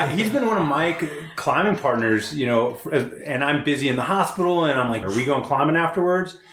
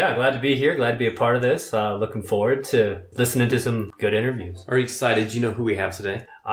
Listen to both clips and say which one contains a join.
first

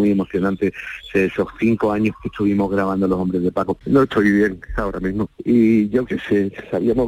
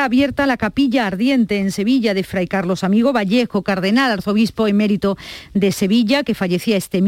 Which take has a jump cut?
first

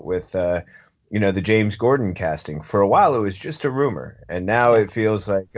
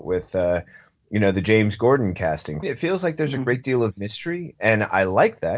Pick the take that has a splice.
second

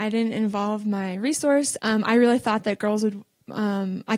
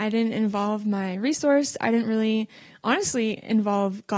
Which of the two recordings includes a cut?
first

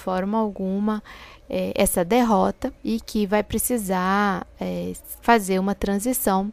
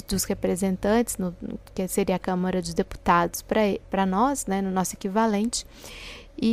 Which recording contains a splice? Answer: first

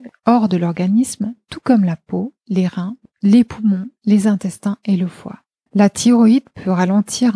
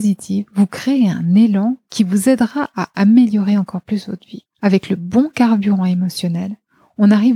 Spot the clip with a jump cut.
first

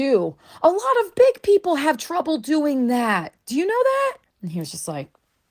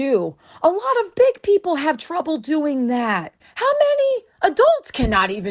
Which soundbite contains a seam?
second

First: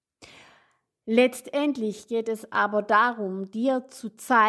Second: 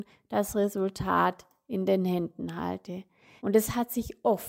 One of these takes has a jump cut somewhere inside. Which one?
second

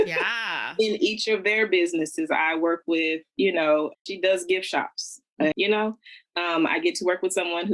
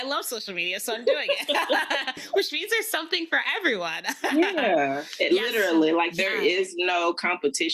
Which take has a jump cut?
first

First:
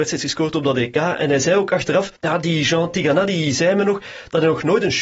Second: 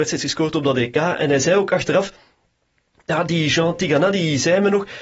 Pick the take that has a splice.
first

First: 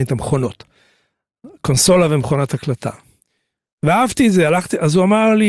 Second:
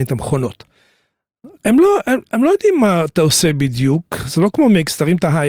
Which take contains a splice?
second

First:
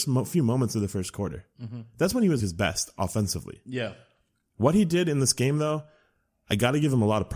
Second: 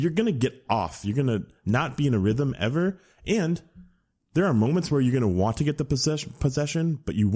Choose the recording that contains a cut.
first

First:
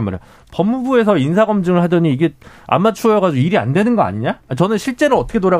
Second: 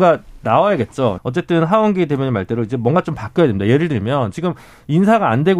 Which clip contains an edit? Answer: second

